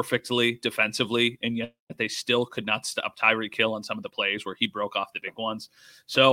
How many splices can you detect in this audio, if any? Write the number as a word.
zero